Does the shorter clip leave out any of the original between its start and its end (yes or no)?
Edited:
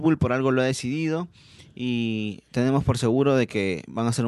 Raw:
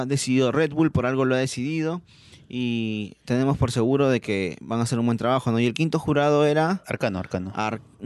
no